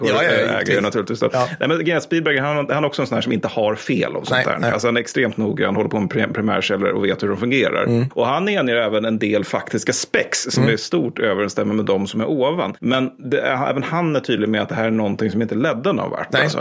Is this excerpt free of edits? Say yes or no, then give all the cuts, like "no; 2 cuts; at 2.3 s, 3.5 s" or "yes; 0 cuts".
yes; 0 cuts